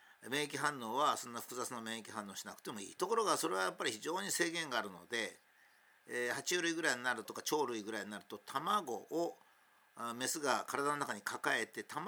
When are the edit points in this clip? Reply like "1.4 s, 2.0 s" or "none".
3.0 s, 7.2 s